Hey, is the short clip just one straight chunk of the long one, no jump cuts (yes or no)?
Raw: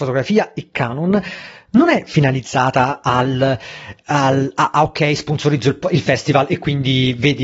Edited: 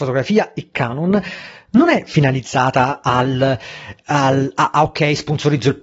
yes